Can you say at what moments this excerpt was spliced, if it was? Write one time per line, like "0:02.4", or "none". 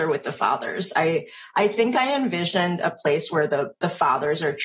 none